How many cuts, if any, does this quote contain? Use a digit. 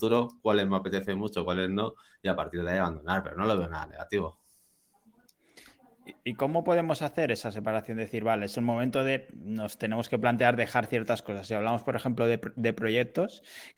0